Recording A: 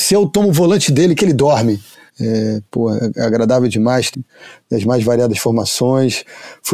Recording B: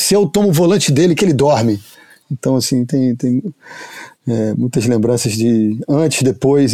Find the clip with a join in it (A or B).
A